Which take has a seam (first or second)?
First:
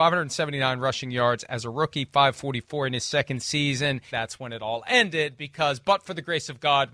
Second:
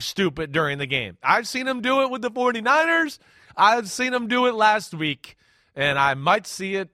first